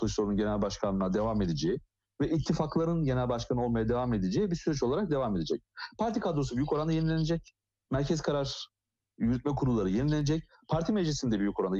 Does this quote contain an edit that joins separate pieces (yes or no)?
no